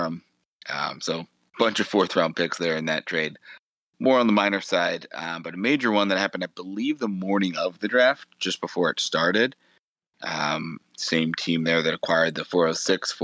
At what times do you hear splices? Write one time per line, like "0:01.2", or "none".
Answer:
none